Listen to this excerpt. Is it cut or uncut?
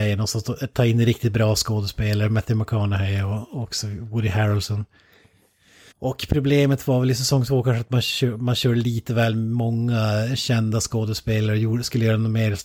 cut